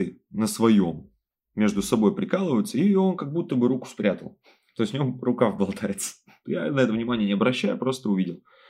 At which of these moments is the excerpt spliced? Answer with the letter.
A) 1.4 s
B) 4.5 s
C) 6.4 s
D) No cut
C